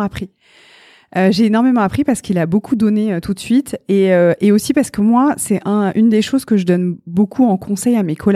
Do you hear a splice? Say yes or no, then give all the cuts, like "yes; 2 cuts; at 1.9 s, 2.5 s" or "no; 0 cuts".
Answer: no; 0 cuts